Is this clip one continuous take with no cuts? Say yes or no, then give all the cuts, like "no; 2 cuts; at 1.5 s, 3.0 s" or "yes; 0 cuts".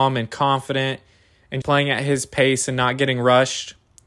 no; 1 cut; at 1.6 s